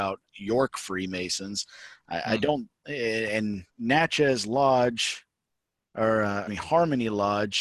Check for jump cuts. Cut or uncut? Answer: cut